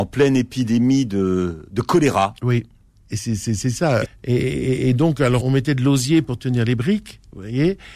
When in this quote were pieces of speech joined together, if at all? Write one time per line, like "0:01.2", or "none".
0:02.9
0:04.1
0:05.4